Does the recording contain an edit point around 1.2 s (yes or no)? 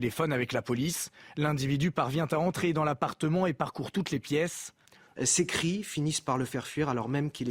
no